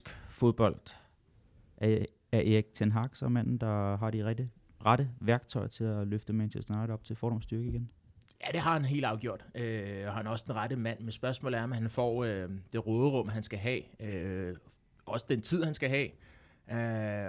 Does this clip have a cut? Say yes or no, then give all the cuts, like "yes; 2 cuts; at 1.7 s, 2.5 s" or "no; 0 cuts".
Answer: no; 0 cuts